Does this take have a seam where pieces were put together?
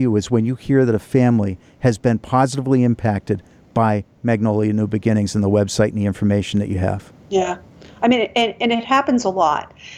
no; 0 cuts

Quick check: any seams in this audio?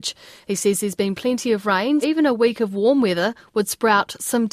yes; 1 cut; at 2.0 s

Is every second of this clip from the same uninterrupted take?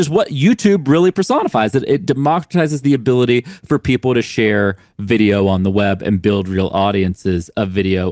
yes; 0 cuts

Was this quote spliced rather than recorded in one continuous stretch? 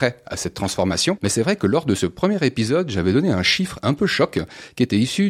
no; 0 cuts

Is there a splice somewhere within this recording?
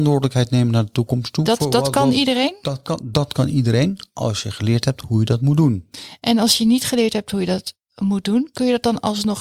no; 0 cuts

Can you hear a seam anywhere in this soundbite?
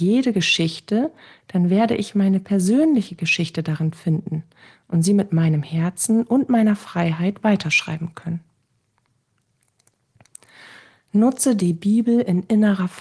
no; 0 cuts

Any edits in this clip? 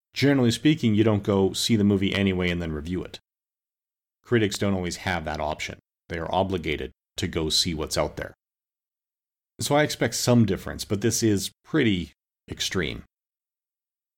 no; 0 cuts

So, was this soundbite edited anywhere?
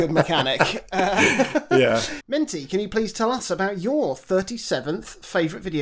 yes; 1 cut; at 2.2 s

